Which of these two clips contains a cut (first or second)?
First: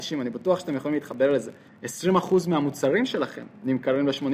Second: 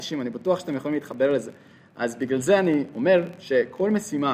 first